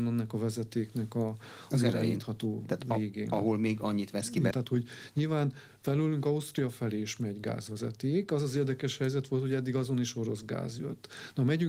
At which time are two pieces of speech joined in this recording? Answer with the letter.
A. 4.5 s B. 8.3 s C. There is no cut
A